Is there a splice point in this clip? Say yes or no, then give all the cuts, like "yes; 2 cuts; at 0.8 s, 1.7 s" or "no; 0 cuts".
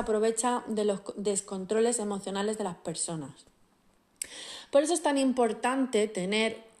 no; 0 cuts